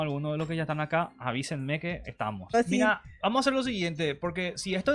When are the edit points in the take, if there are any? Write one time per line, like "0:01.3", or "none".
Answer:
0:02.5

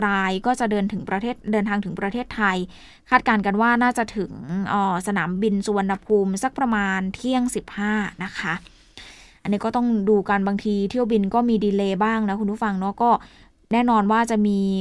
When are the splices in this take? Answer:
none

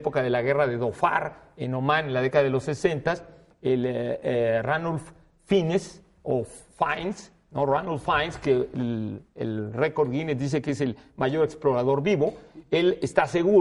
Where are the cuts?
none

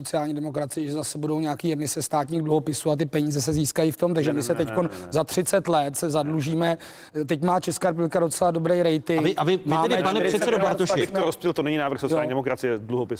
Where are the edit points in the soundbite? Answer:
none

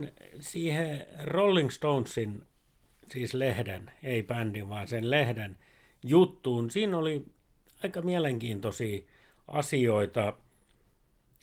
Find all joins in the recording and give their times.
none

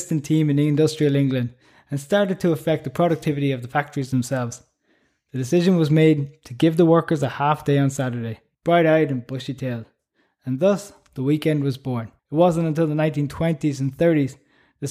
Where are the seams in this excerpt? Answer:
0:08.5
0:12.2

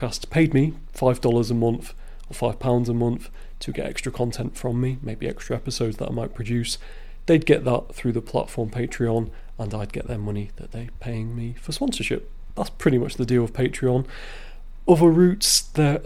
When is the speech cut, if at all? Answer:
none

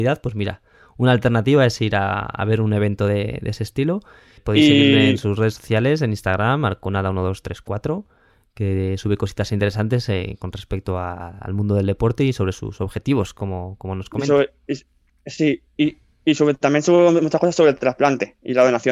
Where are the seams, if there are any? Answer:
none

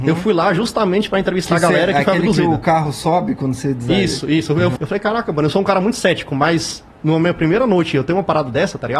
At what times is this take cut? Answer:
0:04.8

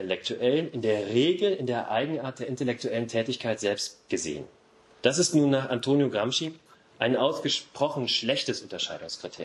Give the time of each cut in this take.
none

